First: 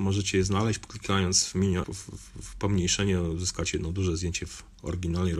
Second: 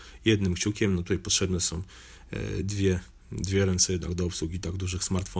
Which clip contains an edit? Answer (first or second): first